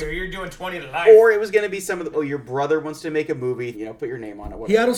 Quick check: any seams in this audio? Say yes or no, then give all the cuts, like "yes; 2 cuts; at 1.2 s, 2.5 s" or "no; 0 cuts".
yes; 2 cuts; at 2.1 s, 3.7 s